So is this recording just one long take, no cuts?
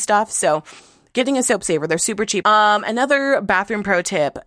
no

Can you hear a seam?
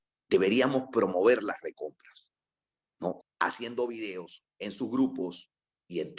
yes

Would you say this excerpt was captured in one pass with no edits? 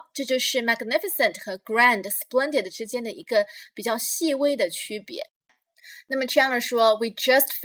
yes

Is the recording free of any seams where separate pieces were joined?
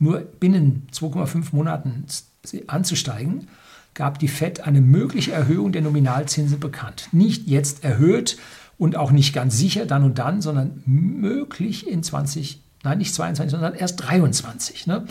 yes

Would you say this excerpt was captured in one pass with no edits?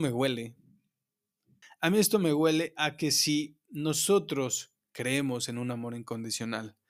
no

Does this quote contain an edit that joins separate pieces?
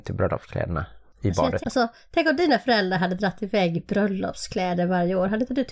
yes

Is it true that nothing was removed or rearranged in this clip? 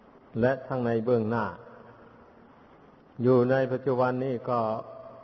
yes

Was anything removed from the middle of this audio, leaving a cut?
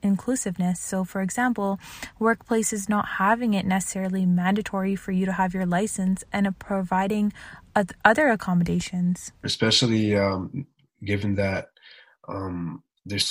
yes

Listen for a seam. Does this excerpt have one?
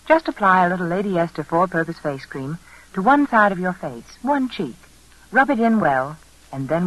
no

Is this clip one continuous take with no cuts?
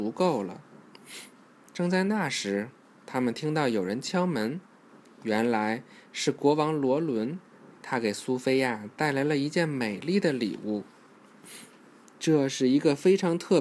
yes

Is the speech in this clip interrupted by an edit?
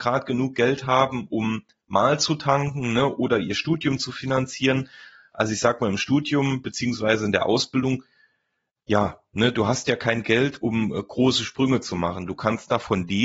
no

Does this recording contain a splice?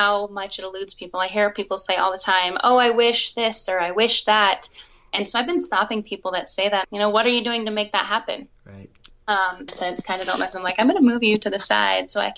yes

